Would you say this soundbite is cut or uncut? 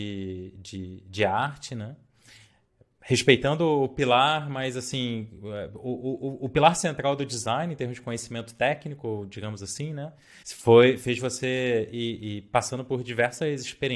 cut